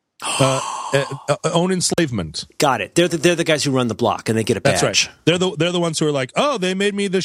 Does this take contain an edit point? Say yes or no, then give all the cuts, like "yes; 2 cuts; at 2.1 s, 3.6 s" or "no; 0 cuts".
no; 0 cuts